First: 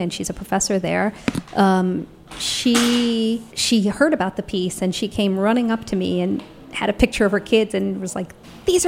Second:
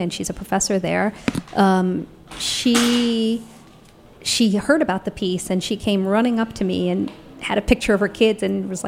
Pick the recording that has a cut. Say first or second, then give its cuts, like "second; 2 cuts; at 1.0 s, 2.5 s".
first; 1 cut; at 3.5 s